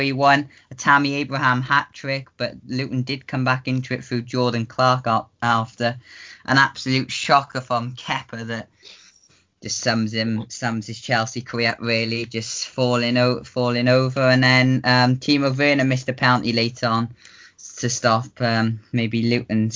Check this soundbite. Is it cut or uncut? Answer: uncut